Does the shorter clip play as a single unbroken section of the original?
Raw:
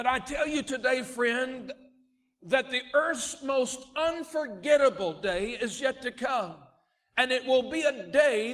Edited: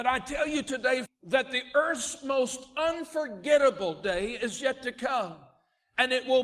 no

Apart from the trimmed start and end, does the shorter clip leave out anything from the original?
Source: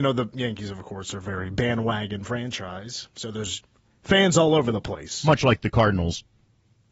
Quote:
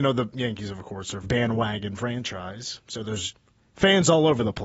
yes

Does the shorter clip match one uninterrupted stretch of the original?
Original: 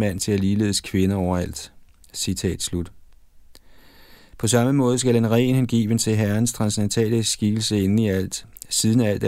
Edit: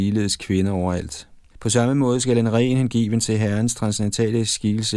no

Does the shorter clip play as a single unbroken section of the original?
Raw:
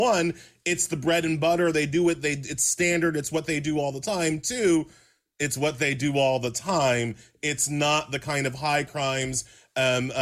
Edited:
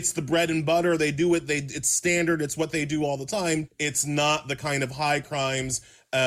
no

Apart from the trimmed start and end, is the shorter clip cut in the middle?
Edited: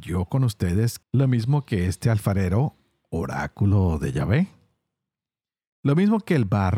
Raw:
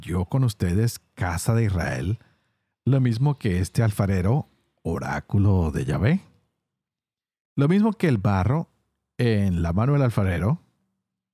yes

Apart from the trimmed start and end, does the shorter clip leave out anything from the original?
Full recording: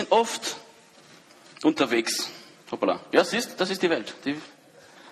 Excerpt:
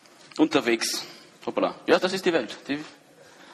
yes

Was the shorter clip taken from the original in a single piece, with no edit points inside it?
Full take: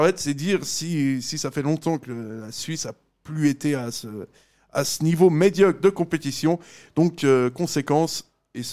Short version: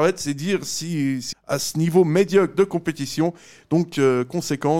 no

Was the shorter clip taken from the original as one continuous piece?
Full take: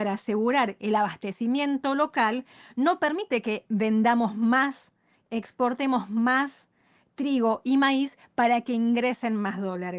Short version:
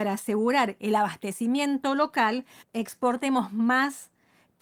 no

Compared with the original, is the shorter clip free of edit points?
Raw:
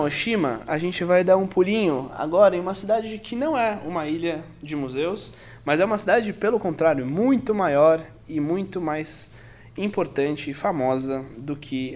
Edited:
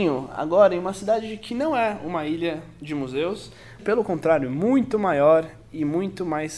no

